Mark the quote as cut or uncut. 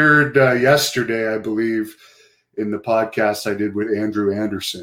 uncut